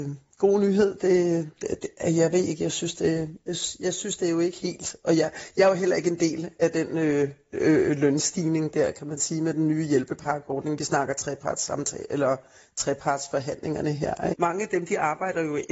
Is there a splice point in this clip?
yes; 1 cut; at 14.3 s

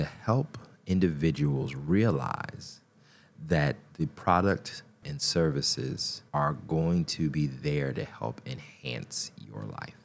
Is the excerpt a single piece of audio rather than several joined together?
no; 2 cuts; at 5.0 s, 6.3 s

